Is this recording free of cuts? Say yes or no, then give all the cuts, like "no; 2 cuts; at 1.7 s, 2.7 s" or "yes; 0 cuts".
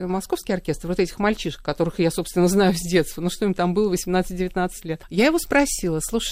yes; 0 cuts